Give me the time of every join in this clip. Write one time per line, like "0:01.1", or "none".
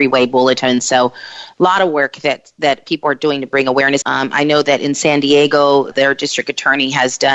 0:04.0
0:05.9